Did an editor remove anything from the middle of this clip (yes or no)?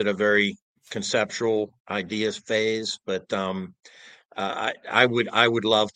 no